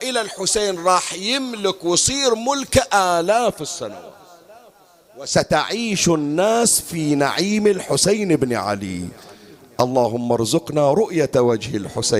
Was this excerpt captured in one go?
yes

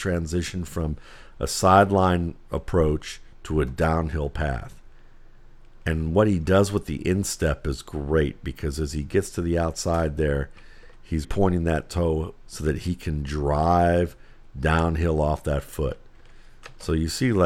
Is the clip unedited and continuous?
no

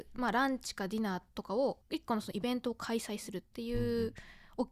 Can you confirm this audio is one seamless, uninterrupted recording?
no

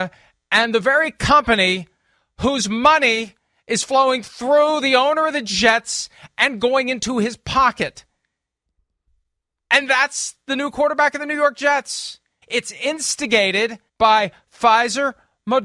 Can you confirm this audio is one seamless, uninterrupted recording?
no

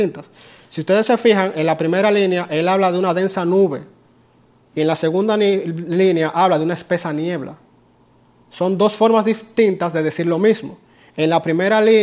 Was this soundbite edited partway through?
no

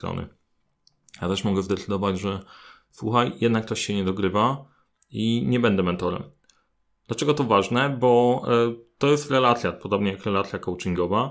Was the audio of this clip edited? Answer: no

